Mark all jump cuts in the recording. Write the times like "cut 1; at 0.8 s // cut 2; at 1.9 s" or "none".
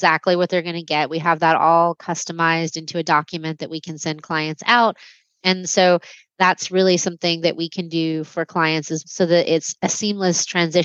cut 1; at 5.4 s // cut 2; at 9.0 s